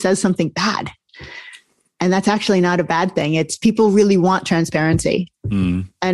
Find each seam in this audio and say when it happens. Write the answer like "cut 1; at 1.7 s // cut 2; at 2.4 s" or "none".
none